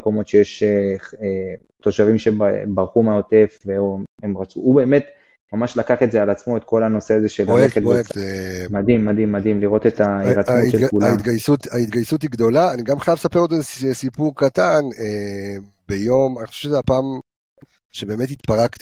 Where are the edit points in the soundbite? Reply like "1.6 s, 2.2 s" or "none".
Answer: 8.1 s

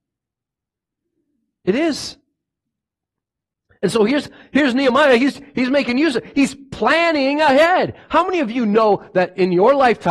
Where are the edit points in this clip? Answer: none

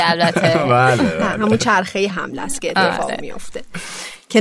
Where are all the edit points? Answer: 2.1 s

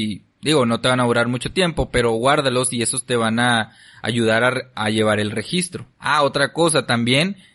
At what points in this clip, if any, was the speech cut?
5.9 s

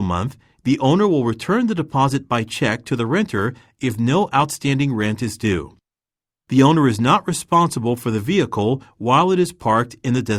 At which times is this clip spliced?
none

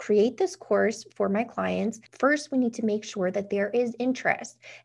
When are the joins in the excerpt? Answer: 2.1 s

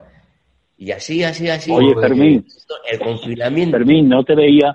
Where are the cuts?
none

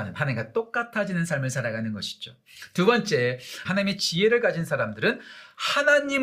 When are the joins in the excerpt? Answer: 3.6 s

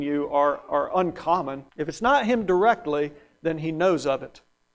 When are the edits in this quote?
1.7 s

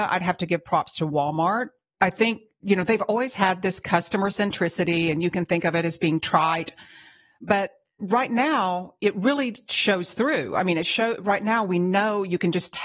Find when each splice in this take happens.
none

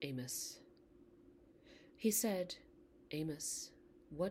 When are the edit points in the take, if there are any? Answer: 1.9 s

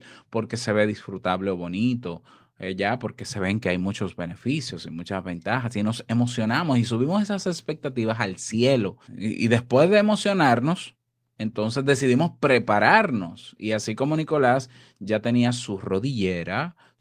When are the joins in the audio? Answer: none

